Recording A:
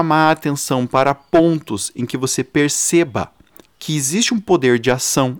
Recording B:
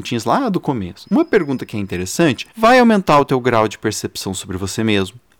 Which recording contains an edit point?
B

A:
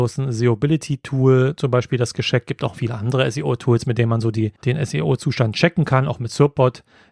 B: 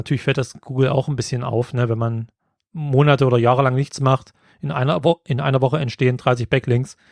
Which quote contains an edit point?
A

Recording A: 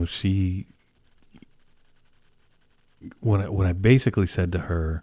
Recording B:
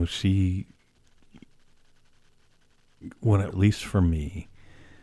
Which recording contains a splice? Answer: B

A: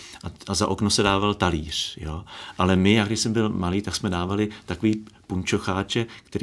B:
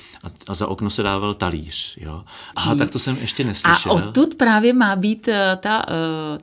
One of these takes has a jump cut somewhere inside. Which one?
B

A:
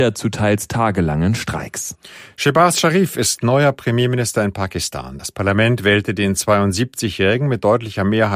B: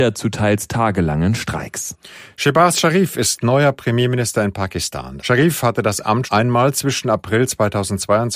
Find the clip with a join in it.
B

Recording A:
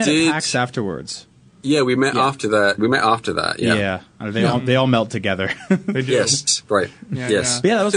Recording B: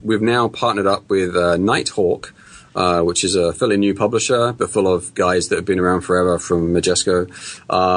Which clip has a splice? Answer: A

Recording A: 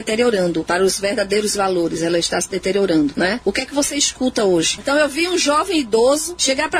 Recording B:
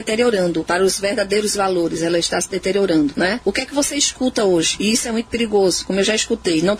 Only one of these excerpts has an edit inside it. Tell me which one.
A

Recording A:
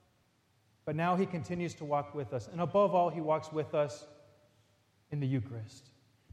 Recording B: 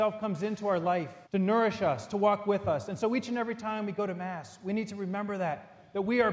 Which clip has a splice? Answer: B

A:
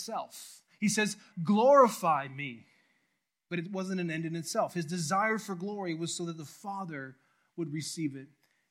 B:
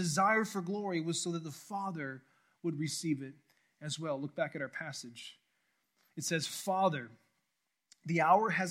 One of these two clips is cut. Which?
A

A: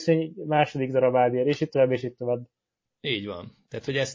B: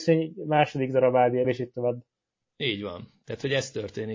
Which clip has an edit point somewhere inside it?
B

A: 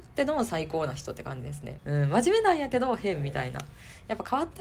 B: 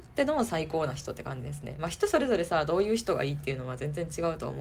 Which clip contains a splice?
A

